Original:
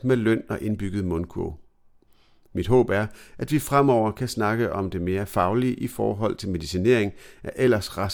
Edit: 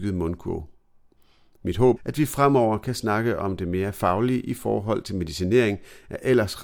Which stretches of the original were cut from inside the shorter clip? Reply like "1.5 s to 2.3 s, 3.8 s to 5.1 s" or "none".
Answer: 2.9 s to 3.3 s

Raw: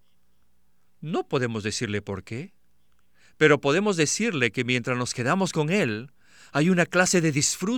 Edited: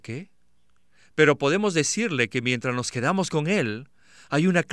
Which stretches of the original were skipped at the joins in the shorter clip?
none

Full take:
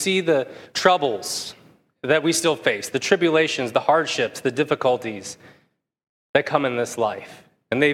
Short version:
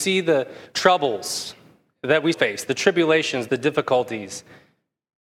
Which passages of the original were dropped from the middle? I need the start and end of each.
2.3 s to 2.6 s, 3.7 s to 4.4 s

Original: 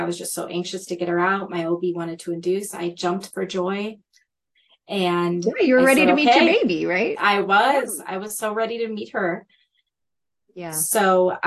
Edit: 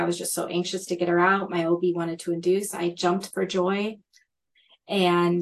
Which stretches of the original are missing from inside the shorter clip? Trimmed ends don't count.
none

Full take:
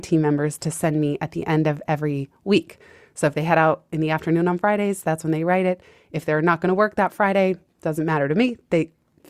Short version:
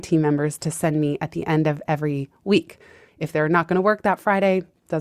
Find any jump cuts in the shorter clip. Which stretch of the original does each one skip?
3.1 s to 6.0 s

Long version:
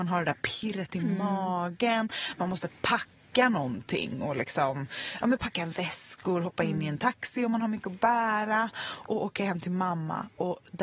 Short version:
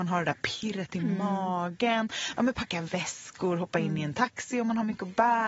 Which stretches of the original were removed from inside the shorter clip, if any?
2.4 s to 5.2 s

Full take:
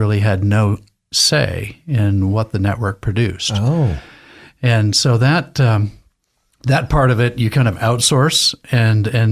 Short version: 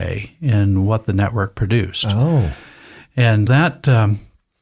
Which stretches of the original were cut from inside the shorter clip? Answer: 4.9 s to 5.2 s

